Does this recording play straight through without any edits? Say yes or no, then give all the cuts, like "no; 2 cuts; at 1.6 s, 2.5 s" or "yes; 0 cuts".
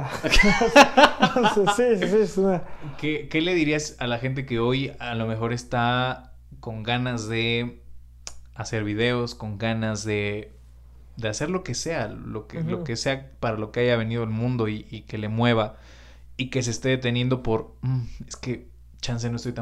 yes; 0 cuts